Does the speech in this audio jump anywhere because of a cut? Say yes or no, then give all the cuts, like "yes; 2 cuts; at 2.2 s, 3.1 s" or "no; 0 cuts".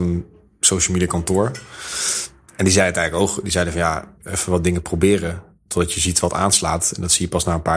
yes; 1 cut; at 4.2 s